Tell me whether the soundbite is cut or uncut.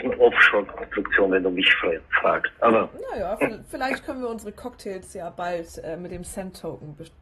uncut